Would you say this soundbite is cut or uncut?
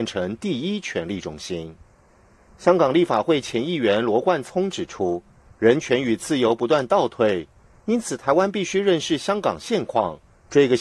cut